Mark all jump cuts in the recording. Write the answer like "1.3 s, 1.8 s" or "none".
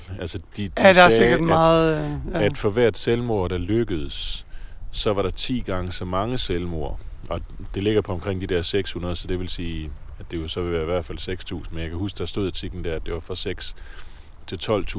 none